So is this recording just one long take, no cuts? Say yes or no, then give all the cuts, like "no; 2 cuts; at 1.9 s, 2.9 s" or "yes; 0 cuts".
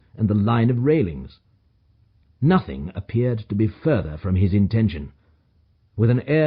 no; 1 cut; at 2.2 s